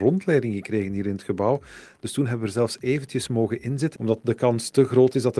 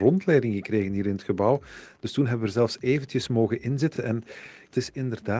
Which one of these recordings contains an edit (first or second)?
first